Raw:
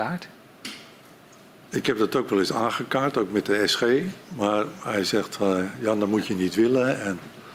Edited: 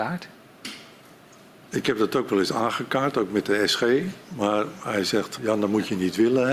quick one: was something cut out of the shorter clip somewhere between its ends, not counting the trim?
yes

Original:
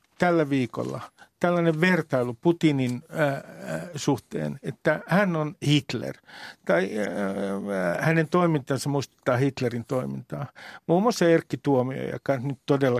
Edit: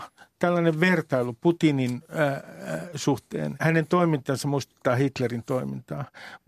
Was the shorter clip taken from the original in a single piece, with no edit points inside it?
no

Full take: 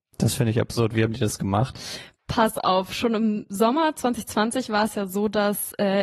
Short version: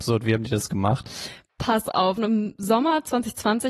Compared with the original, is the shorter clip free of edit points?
no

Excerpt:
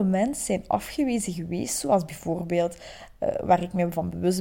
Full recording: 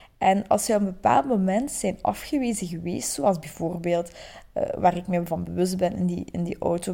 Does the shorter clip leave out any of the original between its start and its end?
no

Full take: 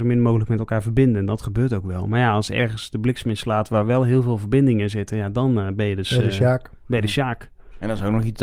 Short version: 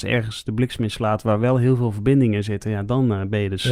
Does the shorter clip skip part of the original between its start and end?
no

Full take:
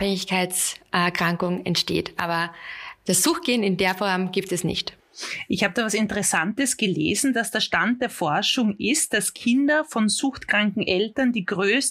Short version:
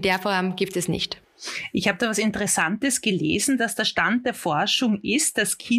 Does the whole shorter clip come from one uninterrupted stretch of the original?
yes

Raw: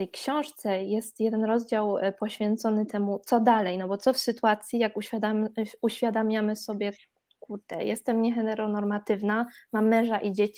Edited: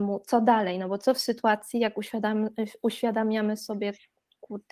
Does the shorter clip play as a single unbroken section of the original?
yes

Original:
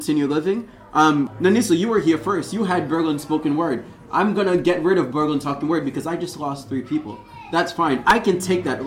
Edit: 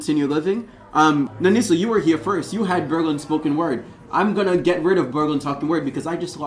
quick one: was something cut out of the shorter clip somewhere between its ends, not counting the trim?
no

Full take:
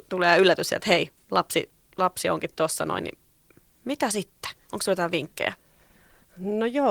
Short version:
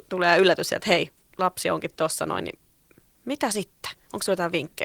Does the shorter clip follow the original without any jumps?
no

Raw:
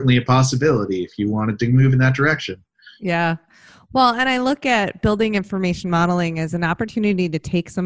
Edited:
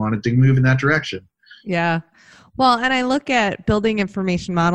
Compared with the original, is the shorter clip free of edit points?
yes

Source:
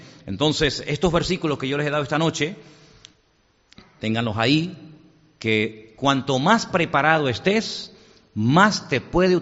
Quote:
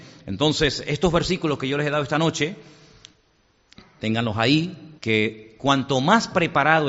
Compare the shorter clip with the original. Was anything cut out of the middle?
yes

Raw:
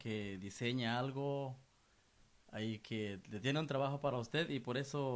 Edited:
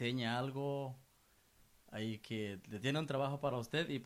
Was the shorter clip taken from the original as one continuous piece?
yes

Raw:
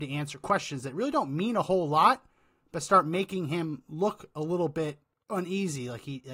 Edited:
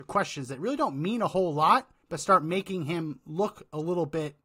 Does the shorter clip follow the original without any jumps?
no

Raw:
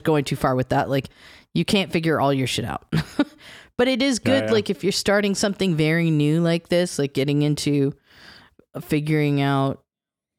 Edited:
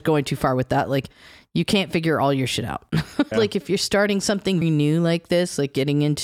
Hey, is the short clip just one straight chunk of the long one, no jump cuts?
no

